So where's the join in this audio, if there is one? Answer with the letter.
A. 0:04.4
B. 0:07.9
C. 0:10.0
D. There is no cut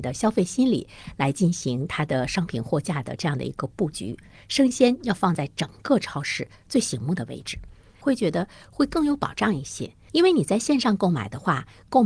B